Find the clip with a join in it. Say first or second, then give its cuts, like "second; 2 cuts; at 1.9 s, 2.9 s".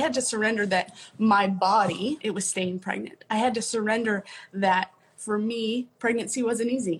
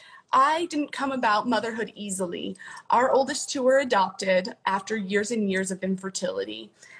first; 1 cut; at 2.2 s